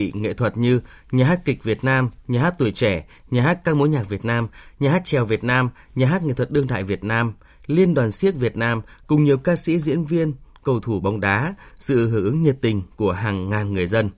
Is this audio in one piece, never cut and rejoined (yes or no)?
yes